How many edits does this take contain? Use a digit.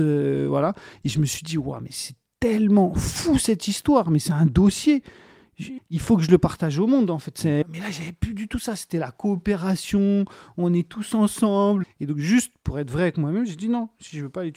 3